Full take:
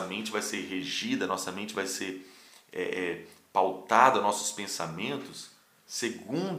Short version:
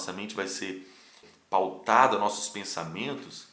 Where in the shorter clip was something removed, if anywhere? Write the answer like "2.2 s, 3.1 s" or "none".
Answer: 1.2 s